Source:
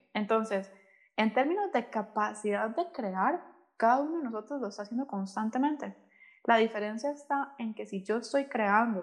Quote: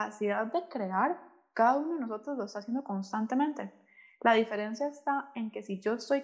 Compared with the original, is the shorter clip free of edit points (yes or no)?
yes